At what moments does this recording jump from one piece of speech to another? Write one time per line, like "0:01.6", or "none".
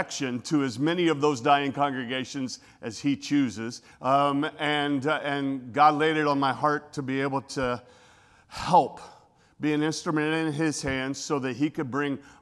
0:03.9